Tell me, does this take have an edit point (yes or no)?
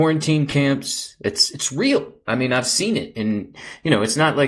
no